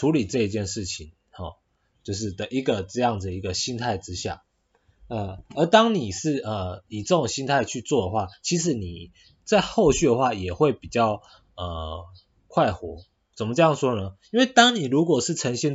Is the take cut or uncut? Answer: uncut